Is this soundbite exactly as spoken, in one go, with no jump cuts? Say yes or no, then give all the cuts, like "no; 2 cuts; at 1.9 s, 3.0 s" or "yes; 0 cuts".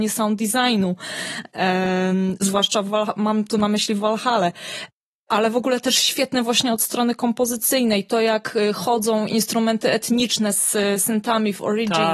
yes; 0 cuts